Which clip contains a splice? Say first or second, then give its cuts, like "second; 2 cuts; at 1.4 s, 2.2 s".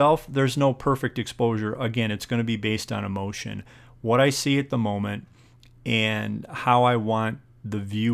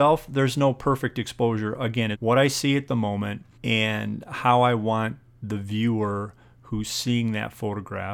second; 2 cuts; at 2.1 s, 3.5 s